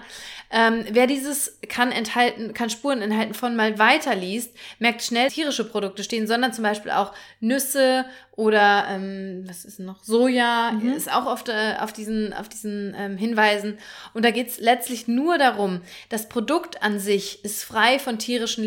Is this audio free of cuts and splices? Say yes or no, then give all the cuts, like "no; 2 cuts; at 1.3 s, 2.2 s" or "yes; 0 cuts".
no; 1 cut; at 5.3 s